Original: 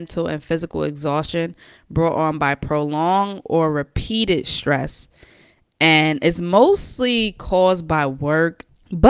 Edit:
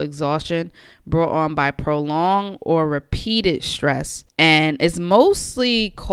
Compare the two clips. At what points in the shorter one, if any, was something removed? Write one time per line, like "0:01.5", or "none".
0:04.3